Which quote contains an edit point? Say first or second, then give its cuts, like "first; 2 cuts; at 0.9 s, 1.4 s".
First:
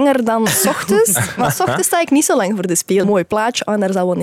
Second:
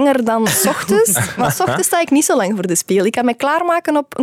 first; 1 cut; at 3.0 s